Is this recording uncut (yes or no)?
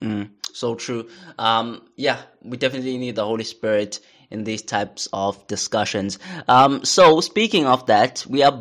yes